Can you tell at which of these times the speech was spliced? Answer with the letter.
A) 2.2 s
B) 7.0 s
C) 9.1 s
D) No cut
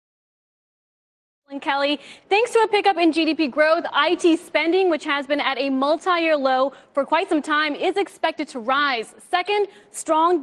D